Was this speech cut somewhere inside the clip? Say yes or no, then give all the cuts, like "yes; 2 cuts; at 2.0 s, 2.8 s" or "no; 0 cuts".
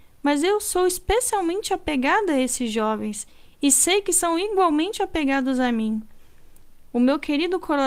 yes; 1 cut; at 6.9 s